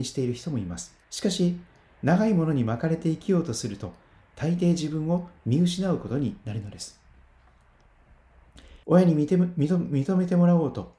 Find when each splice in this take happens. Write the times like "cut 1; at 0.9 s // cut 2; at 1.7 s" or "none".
cut 1; at 1.0 s // cut 2; at 8.8 s